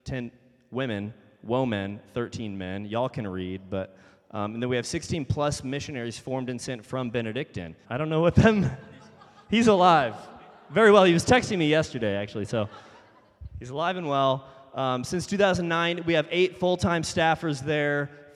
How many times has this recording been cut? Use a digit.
1